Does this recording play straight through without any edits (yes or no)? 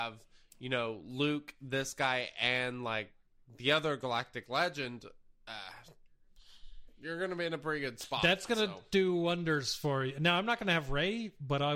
yes